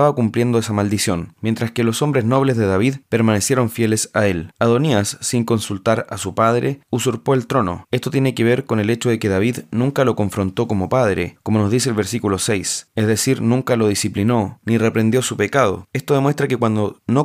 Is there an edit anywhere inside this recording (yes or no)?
no